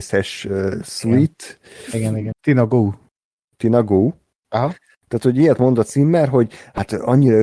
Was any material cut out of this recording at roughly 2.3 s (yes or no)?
yes